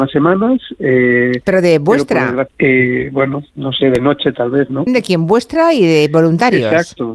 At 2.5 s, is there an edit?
yes; 2 cuts; at 2.5 s, 4.9 s

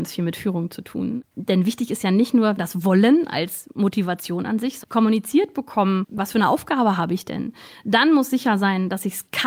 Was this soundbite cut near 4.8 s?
yes; 1 cut; at 4.8 s

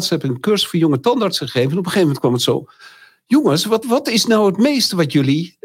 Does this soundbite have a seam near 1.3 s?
no; 1 cut; at 3.8 s

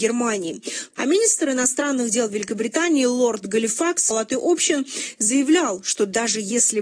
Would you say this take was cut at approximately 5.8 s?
no; 2 cuts; at 0.9 s, 4.1 s

